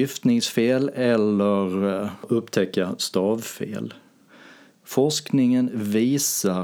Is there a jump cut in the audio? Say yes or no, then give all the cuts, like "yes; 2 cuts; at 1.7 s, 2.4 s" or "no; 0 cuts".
no; 0 cuts